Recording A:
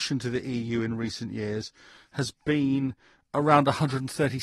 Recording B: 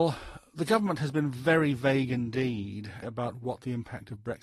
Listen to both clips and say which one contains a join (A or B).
B